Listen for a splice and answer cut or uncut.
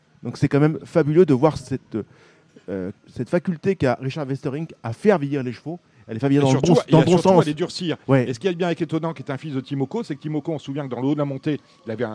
cut